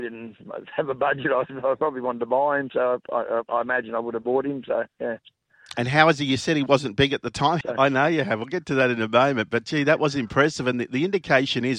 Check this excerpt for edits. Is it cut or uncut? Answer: cut